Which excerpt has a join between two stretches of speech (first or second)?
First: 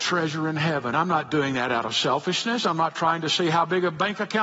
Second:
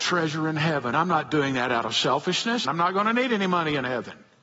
second